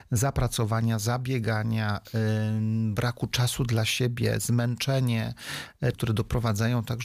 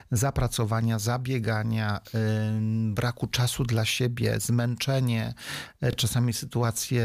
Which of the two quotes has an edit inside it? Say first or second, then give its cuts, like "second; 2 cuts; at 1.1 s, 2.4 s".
first; 1 cut; at 5.9 s